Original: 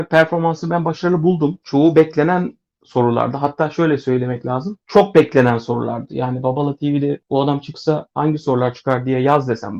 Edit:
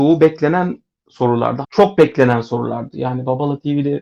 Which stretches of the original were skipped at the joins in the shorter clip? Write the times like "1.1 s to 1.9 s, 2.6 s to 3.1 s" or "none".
3.4 s to 4.8 s